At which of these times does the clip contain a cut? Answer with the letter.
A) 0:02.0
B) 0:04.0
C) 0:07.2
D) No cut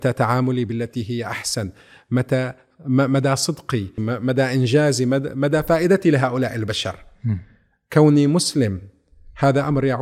B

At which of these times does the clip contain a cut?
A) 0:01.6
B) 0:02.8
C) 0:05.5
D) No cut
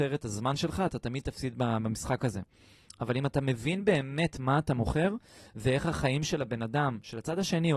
D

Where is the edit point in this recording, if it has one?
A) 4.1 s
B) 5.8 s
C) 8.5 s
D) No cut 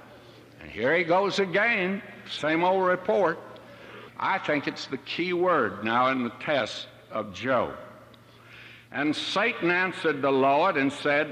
A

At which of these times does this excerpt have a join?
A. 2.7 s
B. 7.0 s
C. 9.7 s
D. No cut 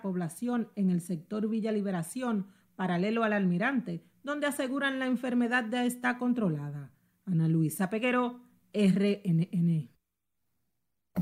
D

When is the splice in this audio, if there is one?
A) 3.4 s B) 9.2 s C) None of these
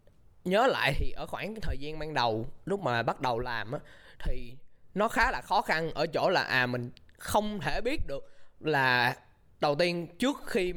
C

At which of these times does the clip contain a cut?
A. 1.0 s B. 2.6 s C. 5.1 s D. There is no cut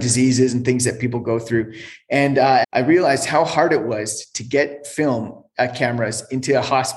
B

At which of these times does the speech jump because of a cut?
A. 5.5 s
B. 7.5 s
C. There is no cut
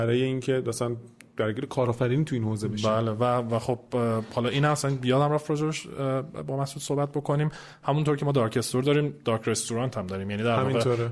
C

